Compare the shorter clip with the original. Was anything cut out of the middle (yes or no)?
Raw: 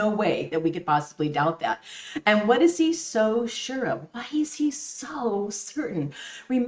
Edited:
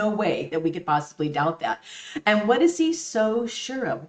no